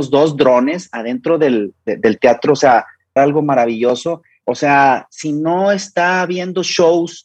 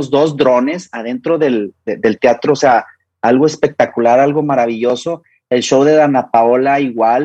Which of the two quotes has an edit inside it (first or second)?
first